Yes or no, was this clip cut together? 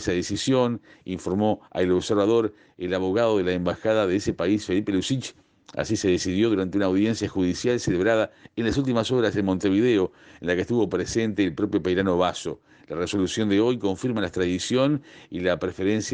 no